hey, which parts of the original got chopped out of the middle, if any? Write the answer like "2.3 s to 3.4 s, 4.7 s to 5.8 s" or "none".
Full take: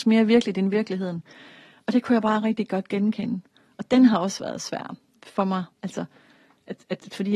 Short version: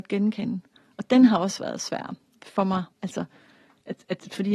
none